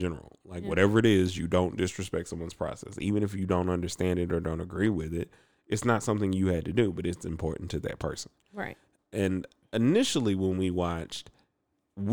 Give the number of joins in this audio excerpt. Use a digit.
1